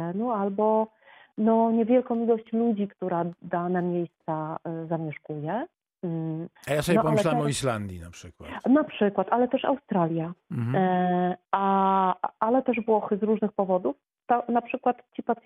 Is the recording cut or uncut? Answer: cut